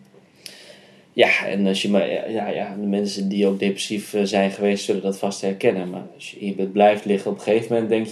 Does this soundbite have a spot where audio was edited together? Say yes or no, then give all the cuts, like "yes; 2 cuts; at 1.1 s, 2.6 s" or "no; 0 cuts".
no; 0 cuts